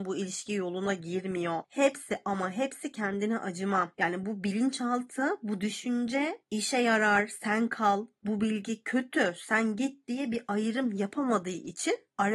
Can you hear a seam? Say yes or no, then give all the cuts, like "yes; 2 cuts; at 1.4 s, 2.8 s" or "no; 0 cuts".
no; 0 cuts